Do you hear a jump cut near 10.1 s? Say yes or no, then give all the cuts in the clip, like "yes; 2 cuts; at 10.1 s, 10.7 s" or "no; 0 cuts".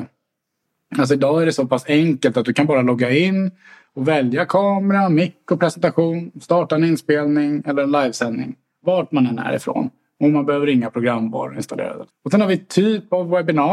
no; 1 cut; at 12.1 s